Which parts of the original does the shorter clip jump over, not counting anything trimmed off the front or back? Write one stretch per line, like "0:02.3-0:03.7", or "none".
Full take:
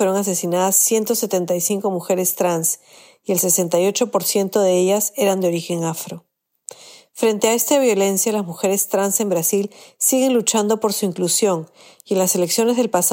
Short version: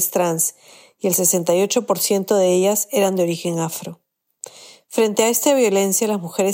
none